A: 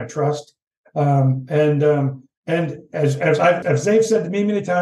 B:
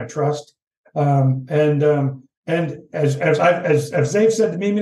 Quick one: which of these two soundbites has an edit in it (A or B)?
A